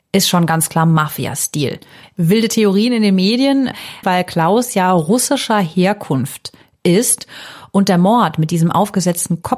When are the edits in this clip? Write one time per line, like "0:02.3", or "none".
0:02.0
0:04.0